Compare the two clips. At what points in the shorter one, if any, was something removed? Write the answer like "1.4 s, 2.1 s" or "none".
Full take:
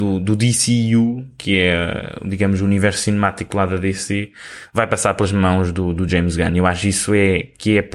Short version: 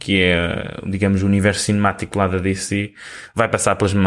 none